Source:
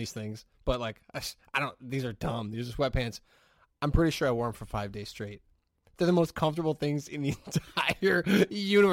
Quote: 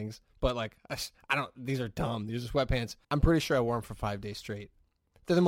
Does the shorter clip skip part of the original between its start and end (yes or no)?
yes